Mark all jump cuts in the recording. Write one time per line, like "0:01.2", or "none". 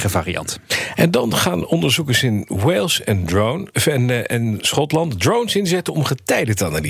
none